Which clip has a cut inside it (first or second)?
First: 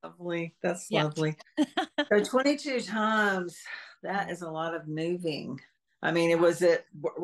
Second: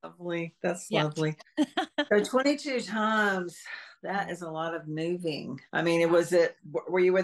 second